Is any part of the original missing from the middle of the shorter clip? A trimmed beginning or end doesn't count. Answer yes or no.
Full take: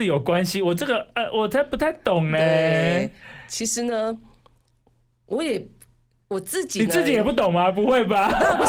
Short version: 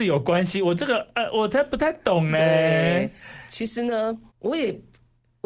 yes